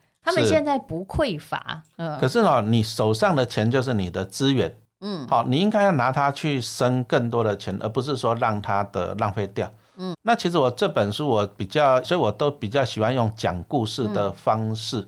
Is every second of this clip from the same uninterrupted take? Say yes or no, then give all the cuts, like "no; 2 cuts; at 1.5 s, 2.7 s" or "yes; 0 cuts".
no; 2 cuts; at 10.1 s, 12.0 s